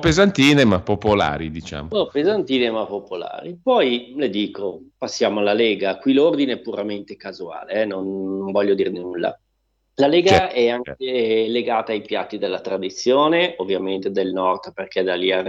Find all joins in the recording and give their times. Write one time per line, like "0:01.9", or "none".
none